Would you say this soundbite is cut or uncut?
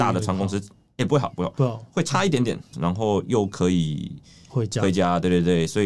cut